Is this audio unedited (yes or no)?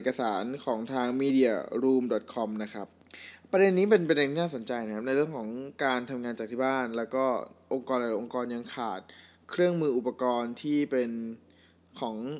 yes